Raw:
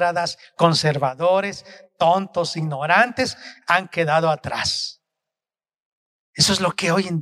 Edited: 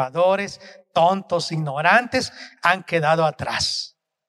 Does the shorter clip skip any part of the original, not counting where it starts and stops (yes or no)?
no